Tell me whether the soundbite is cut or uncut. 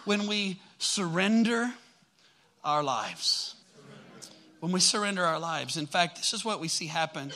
cut